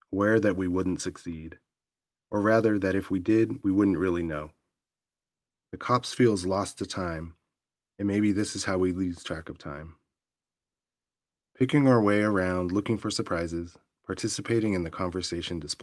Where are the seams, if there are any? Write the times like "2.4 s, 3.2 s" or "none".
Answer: 5.6 s